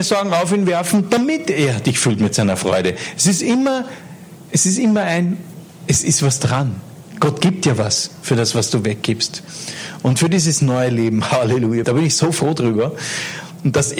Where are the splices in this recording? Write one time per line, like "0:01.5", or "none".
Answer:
0:11.8